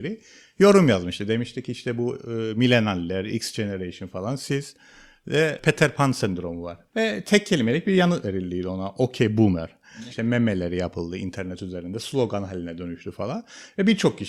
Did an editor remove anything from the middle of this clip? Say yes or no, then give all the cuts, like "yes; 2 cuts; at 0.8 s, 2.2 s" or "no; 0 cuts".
yes; 2 cuts; at 6.9 s, 10.1 s